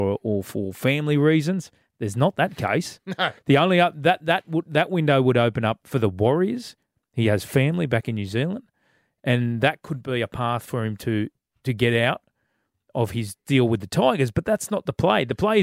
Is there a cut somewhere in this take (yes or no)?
no